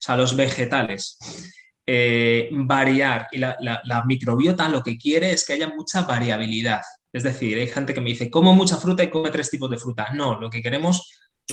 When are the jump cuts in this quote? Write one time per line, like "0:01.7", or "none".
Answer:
none